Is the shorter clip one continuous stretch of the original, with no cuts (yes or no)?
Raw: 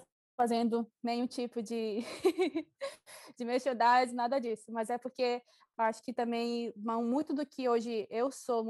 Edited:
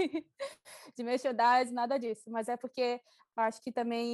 yes